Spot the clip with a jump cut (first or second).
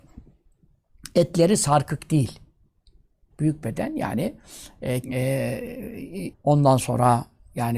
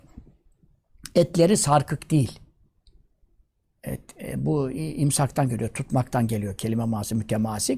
first